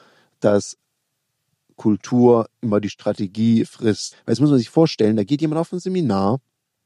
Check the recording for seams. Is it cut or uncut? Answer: cut